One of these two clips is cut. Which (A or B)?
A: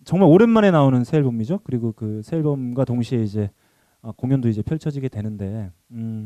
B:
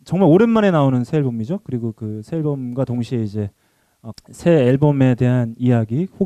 B